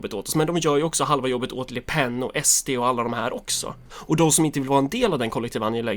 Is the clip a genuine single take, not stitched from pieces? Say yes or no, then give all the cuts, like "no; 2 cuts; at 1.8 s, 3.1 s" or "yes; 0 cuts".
no; 1 cut; at 3.9 s